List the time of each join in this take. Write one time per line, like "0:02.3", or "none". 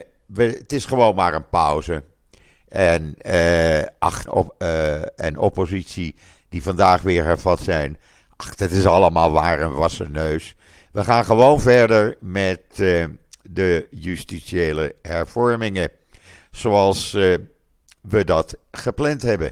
0:04.3